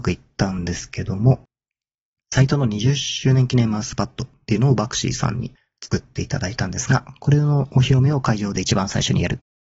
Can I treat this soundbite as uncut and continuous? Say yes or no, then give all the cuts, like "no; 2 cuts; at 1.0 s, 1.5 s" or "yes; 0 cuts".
yes; 0 cuts